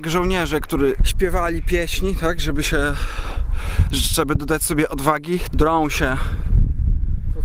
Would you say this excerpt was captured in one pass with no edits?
no; 2 cuts; at 1.0 s, 5.5 s

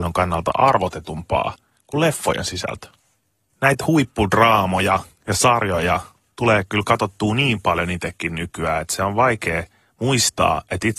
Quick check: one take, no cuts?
yes; 0 cuts

